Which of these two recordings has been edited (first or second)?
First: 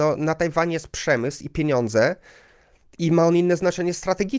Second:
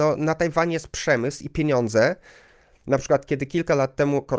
second